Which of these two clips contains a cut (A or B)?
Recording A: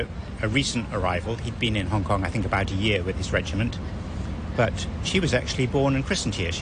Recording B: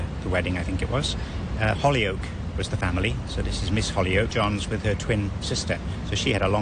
B